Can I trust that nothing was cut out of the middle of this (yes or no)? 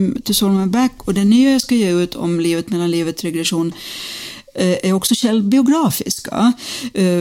yes